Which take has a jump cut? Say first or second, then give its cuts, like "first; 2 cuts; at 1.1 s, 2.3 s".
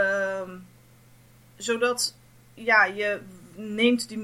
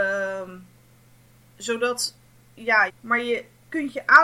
second; 1 cut; at 2.9 s